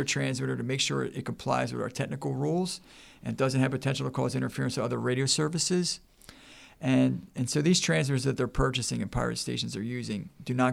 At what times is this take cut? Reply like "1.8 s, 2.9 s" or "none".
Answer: none